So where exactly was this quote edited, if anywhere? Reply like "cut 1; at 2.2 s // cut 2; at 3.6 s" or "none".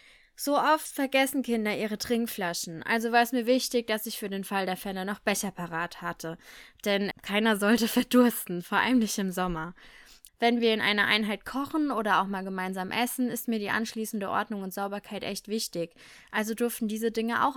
cut 1; at 7.1 s // cut 2; at 10.3 s